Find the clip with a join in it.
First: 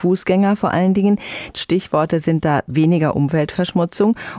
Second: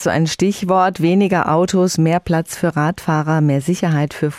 first; 1 cut; at 1.5 s

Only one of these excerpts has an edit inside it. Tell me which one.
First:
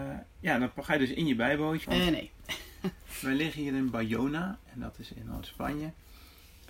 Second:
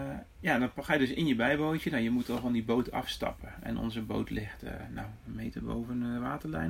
first; 1 cut; at 1.8 s

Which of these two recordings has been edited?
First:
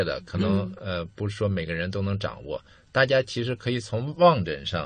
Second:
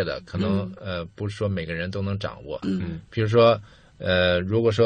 second; 1 cut; at 2.6 s

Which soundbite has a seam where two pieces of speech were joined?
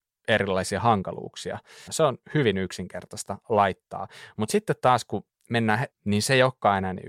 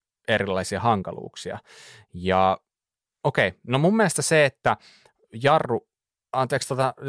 first; 2 cuts; at 1.9 s, 5.9 s

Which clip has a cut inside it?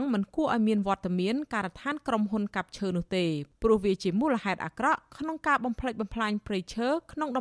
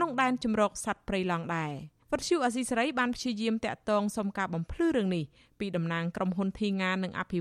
second; 1 cut; at 2.0 s

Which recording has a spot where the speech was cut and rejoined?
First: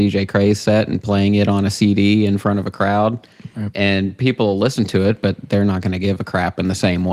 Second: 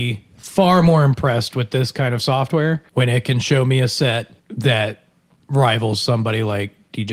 second; 2 cuts; at 2.9 s, 4.4 s

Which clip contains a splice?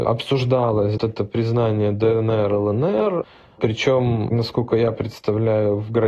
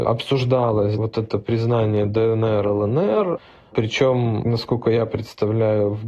first; 1 cut; at 1.0 s

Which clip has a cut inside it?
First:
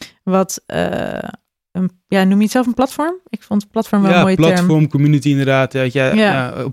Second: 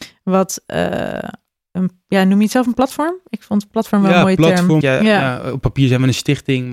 second; 1 cut; at 4.8 s

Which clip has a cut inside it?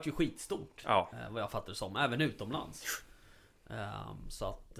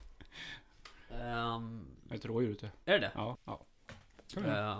second; 1 cut; at 3.3 s

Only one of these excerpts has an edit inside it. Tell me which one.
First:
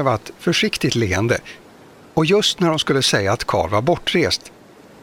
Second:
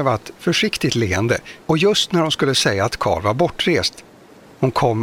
second; 1 cut; at 1.6 s

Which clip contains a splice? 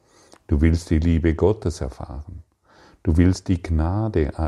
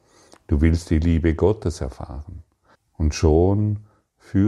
second; 1 cut; at 2.7 s

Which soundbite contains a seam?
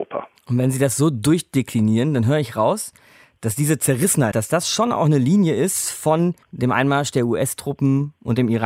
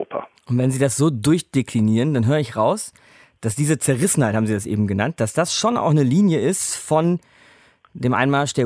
first; 2 cuts; at 4.3 s, 6.4 s

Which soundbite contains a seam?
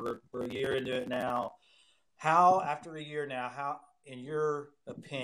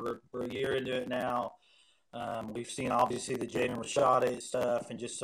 first; 1 cut; at 2.1 s

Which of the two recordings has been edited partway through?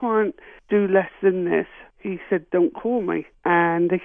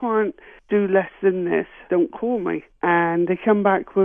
second; 1 cut; at 1.9 s

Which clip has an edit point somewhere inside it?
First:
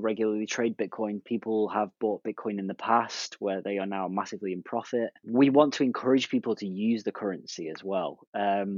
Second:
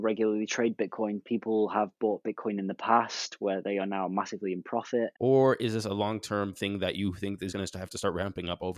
second; 2 cuts; at 5.1 s, 7.5 s

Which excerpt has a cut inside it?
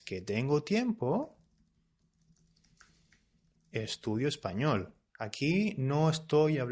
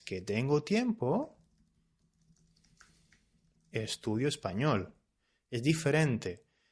first; 1 cut; at 5.1 s

